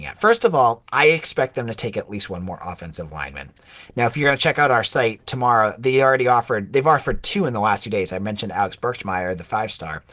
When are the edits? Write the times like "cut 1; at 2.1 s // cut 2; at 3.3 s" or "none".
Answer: none